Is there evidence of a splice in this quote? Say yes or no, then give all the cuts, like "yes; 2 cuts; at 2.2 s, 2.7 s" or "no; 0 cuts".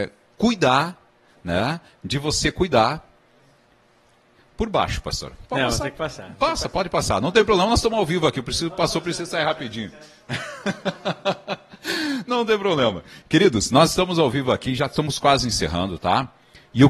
no; 0 cuts